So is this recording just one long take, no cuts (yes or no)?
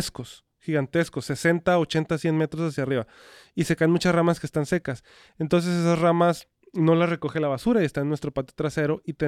yes